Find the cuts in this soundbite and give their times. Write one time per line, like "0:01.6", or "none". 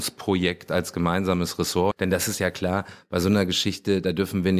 0:01.9